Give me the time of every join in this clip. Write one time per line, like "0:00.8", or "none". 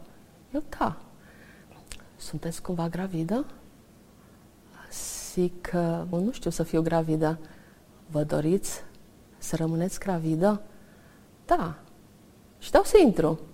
0:06.1